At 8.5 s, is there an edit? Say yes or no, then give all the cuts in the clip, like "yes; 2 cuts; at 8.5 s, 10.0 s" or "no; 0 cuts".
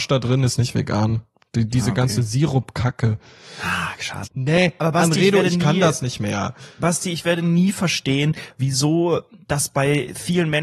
no; 1 cut; at 4.3 s